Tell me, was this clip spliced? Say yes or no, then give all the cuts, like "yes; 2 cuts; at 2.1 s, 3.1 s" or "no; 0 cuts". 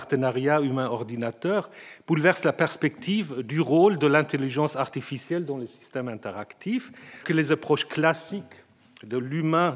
yes; 1 cut; at 7.2 s